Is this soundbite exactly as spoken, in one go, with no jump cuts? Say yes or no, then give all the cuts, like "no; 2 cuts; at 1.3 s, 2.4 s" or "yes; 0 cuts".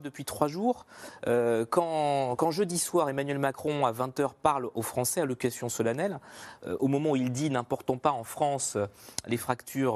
yes; 0 cuts